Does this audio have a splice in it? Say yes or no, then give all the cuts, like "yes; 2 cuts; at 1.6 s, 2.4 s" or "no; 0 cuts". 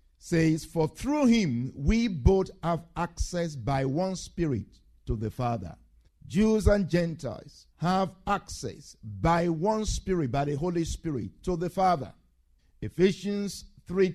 yes; 2 cuts; at 6.1 s, 7.7 s